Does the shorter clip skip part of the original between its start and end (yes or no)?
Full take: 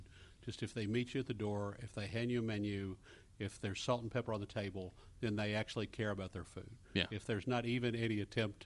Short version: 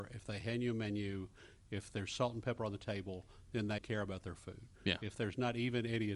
yes